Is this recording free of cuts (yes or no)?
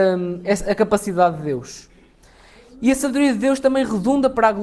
yes